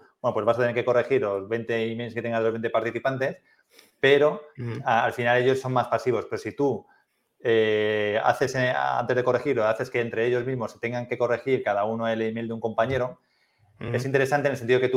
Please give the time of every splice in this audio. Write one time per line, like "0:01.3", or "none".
none